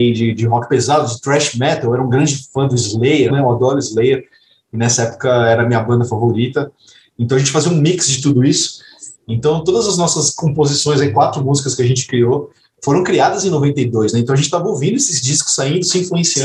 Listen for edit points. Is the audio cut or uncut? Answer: cut